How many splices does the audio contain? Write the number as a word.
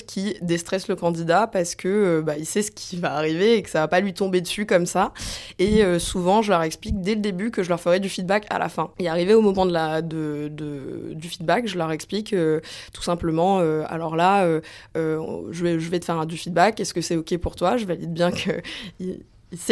one